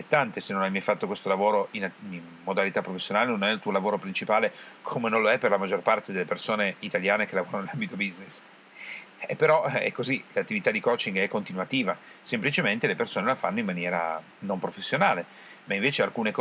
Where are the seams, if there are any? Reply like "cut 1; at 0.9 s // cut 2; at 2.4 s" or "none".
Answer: cut 1; at 9.1 s